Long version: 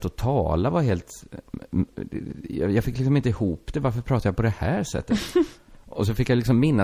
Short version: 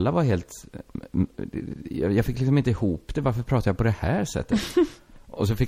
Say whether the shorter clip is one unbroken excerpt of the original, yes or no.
yes